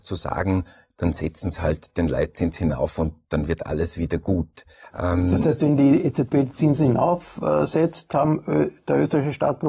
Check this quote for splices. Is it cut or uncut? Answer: cut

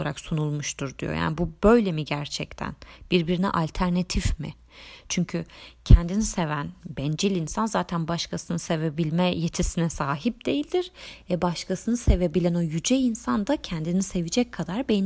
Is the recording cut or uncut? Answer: uncut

